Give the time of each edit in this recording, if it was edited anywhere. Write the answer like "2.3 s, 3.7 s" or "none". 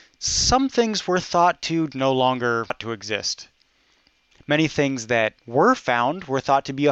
1.9 s

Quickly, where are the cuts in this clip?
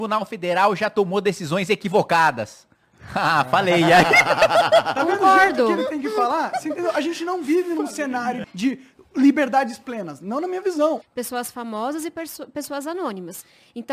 8.4 s, 11.0 s

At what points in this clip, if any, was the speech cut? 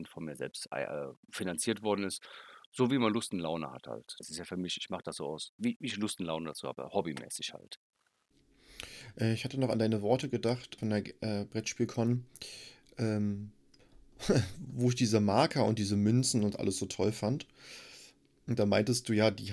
4.2 s, 10.8 s

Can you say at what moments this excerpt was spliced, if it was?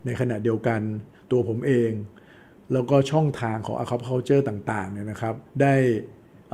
5.5 s

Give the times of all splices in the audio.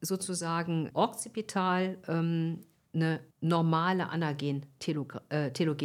0.9 s, 3.3 s

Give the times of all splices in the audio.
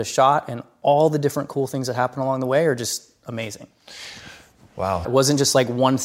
5.0 s

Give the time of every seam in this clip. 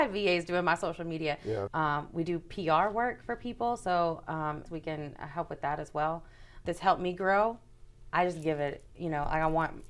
1.7 s, 4.7 s, 6.7 s

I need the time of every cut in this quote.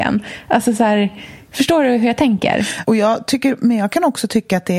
2.8 s

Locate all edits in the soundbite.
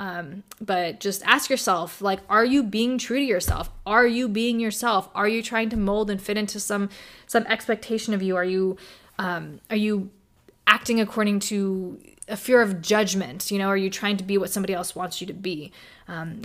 none

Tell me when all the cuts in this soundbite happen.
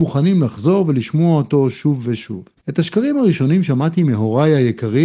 2.6 s

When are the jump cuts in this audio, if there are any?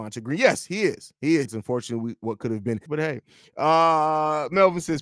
1.4 s, 2.9 s

